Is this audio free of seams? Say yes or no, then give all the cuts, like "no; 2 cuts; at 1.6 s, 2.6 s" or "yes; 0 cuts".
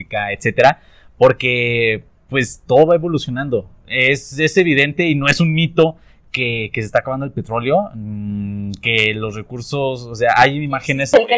no; 1 cut; at 3.8 s